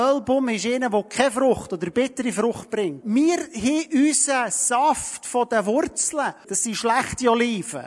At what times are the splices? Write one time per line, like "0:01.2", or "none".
0:03.0
0:06.4